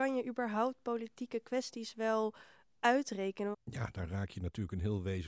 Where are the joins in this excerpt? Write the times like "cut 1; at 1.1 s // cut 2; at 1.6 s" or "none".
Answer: cut 1; at 3.5 s